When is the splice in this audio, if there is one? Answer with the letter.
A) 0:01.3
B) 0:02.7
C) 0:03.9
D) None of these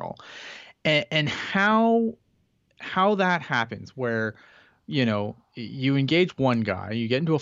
D